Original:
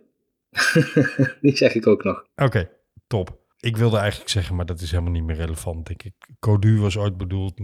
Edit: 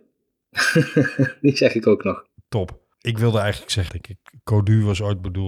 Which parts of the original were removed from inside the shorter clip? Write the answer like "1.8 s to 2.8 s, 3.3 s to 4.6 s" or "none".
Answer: 2.4 s to 2.9 s, 4.5 s to 5.8 s